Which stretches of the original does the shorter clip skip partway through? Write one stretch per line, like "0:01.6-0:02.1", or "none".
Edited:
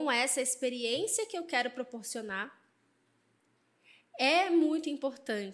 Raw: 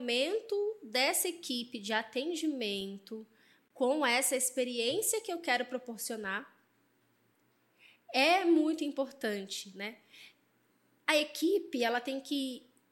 none